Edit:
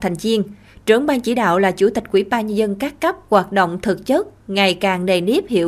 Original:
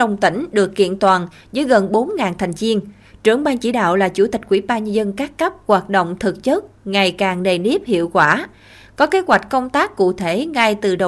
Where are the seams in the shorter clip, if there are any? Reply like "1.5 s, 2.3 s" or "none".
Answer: none